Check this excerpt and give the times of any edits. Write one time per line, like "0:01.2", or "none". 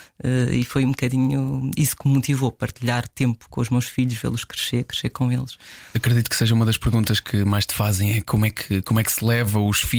none